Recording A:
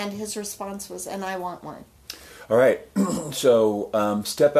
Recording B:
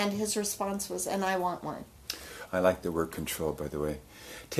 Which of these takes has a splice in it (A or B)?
B